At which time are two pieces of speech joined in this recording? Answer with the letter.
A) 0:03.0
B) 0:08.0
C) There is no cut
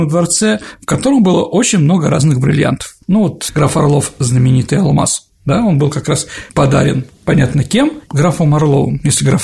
C